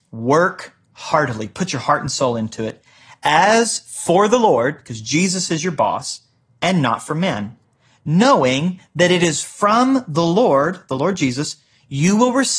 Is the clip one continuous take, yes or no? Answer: yes